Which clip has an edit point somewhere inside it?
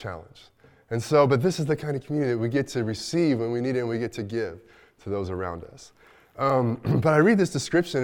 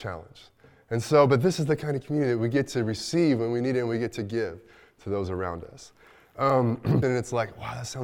second; 1 cut; at 7.0 s

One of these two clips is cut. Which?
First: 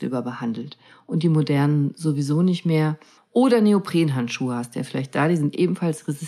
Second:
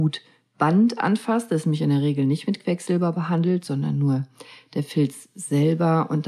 first; 1 cut; at 3.2 s

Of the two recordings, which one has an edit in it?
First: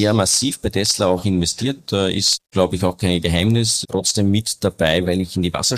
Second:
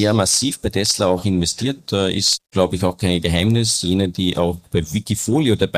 first; 1 cut; at 3.8 s

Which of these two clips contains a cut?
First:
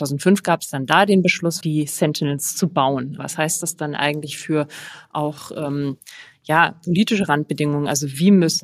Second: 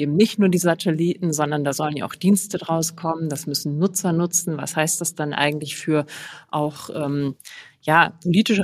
first; 2 cuts; at 1.6 s, 3.2 s

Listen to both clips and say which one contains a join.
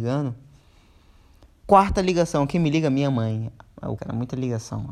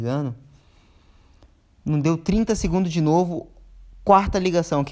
first; 2 cuts; at 1.6 s, 4.0 s

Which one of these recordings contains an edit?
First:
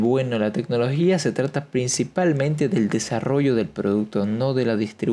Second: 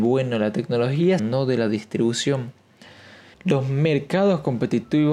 second; 2 cuts; at 1.2 s, 3.3 s

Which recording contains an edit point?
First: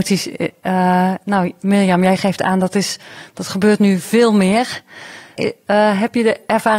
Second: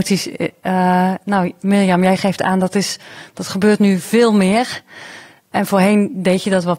first; 1 cut; at 5.4 s

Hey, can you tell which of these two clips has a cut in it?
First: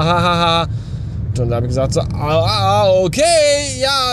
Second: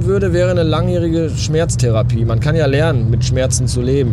first; 1 cut; at 1.3 s

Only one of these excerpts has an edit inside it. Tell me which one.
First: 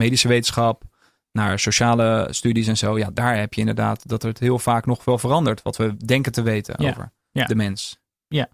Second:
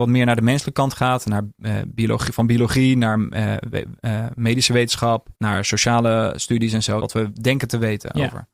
second; 2 cuts; at 5.3 s, 7.0 s

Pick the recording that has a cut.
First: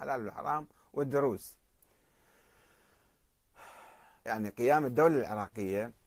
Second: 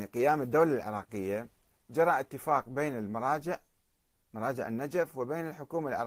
first; 1 cut; at 4.2 s

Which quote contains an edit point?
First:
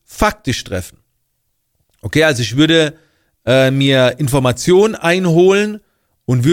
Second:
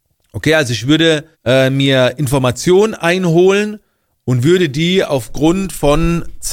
second; 1 cut; at 1.3 s

